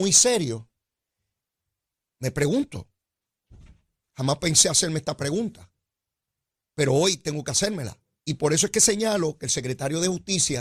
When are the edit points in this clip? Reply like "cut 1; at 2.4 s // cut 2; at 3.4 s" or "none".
cut 1; at 2.0 s // cut 2; at 8.2 s

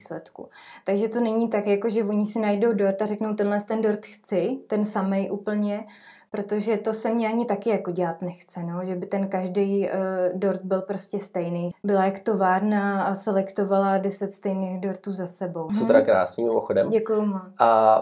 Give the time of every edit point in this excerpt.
cut 1; at 11.7 s // cut 2; at 15.7 s

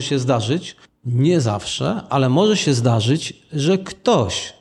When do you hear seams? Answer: none

